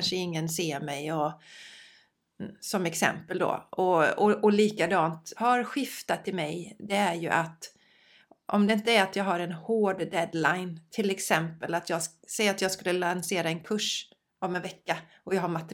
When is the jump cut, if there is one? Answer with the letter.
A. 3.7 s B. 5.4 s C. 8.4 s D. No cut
B